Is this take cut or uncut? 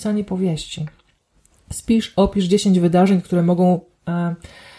uncut